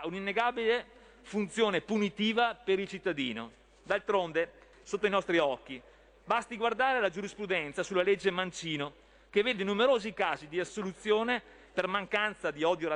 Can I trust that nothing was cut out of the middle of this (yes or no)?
no